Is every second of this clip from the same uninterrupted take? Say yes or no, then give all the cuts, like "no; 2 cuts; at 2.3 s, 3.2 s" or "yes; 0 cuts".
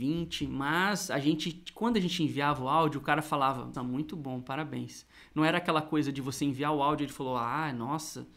no; 1 cut; at 3.7 s